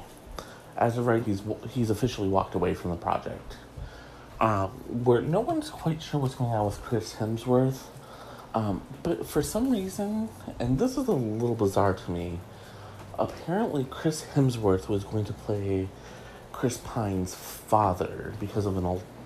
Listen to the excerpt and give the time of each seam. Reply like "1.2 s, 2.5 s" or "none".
1.2 s, 8.5 s